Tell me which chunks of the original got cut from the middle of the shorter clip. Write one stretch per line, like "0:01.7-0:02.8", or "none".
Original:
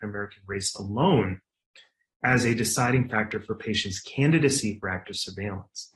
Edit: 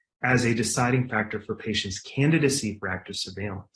none